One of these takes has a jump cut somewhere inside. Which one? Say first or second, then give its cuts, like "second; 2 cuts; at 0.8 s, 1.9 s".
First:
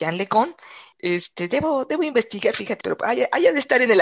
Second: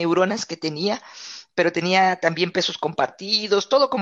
first; 2 cuts; at 0.9 s, 2.8 s